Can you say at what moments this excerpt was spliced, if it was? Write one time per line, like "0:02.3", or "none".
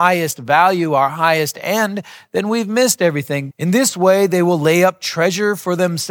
0:03.5